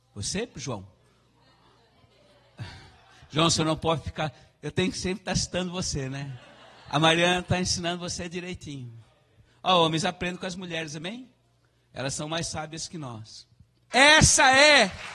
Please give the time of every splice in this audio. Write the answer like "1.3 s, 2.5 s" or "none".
13.9 s